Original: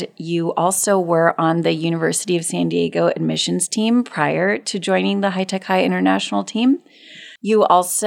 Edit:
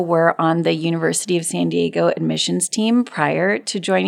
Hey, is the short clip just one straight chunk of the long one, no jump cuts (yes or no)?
yes